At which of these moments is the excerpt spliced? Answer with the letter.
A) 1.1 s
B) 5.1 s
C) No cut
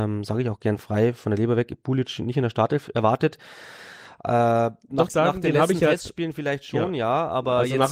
B